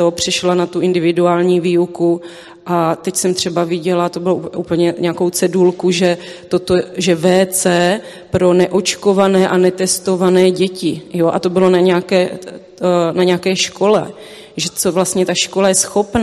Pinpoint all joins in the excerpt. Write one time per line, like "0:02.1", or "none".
none